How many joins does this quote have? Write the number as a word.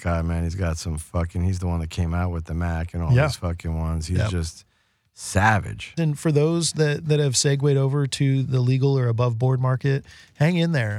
two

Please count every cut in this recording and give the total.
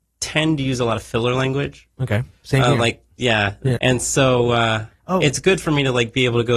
one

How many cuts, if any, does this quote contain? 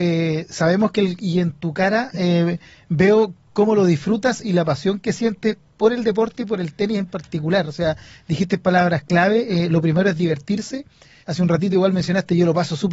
two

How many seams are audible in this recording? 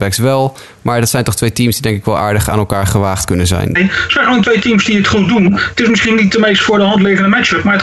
one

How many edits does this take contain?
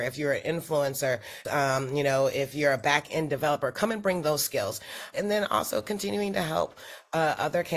two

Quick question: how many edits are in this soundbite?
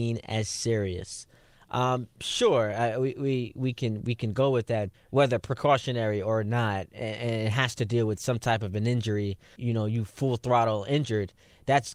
two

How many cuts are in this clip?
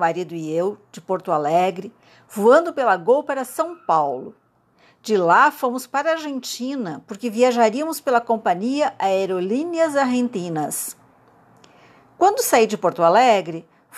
zero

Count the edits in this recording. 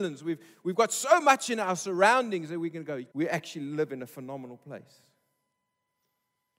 one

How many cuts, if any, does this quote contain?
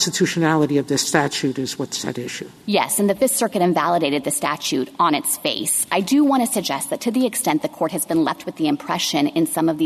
zero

